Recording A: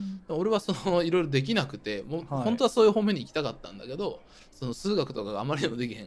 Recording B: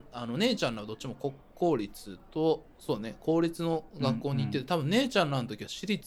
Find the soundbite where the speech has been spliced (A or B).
B